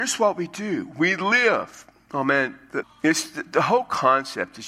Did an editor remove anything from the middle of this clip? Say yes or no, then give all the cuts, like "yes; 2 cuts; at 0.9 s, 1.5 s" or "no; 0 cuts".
yes; 1 cut; at 2.8 s